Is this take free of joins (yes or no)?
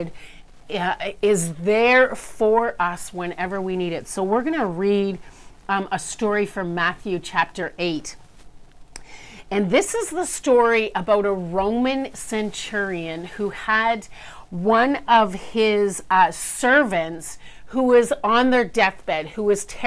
yes